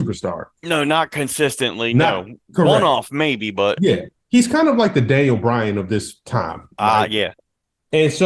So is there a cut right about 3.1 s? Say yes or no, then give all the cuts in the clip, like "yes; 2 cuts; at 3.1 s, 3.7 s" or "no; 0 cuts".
no; 0 cuts